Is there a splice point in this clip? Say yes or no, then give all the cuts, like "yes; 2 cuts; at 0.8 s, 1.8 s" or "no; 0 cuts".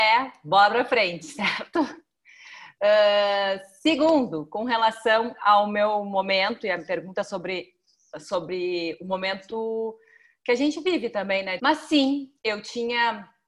yes; 1 cut; at 11.6 s